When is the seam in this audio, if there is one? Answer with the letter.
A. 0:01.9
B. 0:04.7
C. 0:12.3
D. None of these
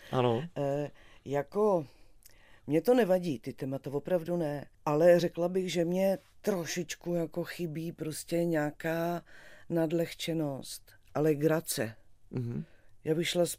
B